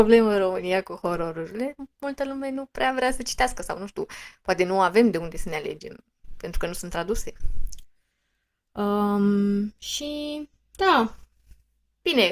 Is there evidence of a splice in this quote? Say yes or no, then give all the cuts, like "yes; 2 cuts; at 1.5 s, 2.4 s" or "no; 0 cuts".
no; 0 cuts